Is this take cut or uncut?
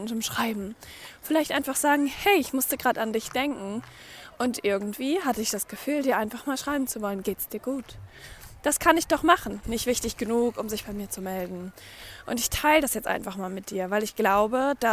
cut